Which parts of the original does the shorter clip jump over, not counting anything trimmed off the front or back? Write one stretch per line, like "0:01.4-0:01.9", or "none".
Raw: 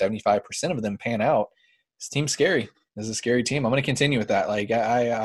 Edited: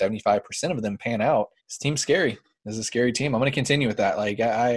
0:01.6-0:01.9

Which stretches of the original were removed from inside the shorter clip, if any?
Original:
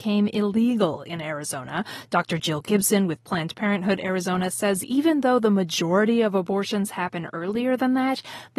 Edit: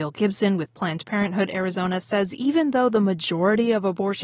none

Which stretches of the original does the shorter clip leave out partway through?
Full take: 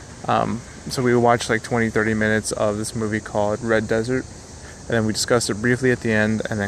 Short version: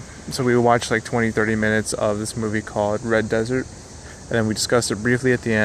none

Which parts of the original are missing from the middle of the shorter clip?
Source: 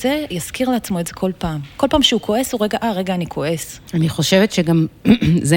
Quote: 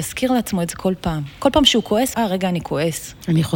0:02.5-0:02.8

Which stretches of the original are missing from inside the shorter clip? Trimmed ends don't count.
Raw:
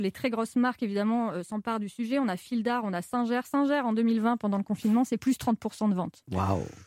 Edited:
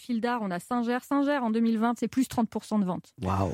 0:04.4-0:05.1

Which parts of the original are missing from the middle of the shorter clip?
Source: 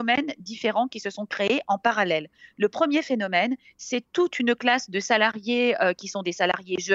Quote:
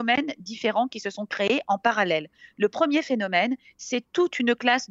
none

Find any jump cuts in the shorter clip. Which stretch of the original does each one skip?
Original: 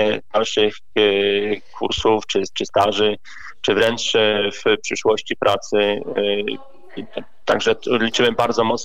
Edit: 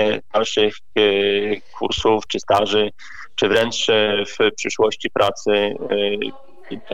0:02.3-0:02.5

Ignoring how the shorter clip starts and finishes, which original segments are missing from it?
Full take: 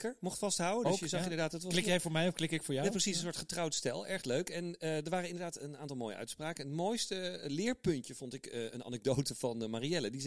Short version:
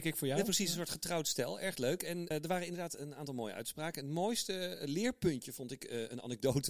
0:04.8-0:04.9

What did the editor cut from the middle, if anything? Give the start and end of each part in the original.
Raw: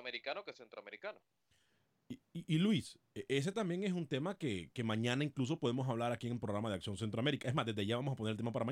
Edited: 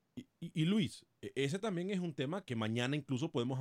0:04.4-0:04.7

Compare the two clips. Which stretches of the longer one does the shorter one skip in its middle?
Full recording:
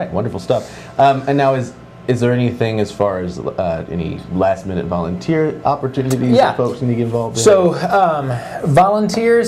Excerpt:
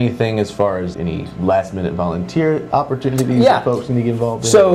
0:03.3-0:03.9

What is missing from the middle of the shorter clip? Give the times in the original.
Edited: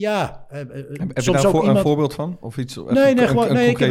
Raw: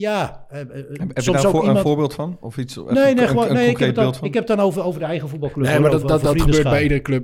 none

